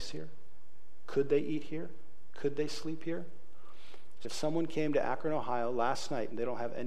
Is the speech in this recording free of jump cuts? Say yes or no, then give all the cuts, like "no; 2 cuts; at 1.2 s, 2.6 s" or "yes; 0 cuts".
no; 1 cut; at 4.2 s